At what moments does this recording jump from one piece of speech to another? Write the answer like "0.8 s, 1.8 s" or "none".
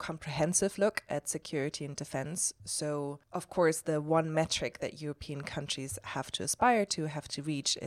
none